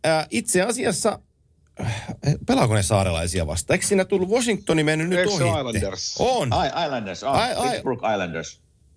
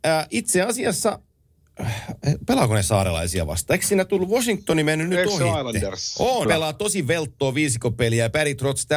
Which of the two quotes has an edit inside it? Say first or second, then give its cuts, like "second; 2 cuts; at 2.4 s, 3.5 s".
second; 1 cut; at 6.5 s